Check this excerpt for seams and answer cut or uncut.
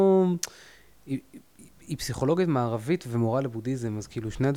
uncut